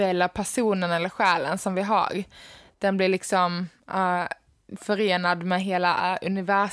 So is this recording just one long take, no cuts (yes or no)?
yes